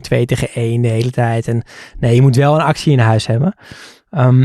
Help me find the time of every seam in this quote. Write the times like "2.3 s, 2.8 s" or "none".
none